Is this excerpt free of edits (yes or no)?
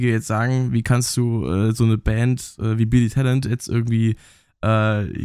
yes